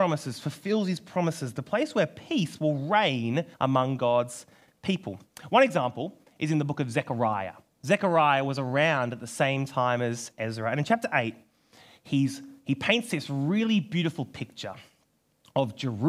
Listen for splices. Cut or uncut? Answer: cut